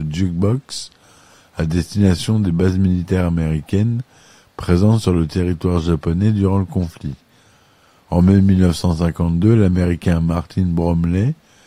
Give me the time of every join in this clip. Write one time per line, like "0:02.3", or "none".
none